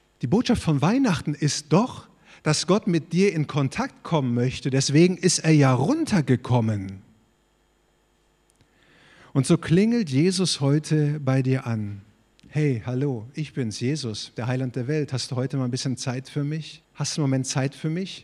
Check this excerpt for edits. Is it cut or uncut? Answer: cut